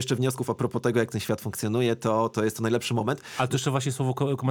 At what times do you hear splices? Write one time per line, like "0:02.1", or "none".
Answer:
none